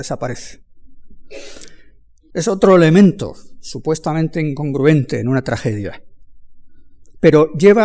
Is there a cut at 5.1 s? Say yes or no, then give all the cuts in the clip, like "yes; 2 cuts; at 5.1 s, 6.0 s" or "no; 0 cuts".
no; 1 cut; at 2.3 s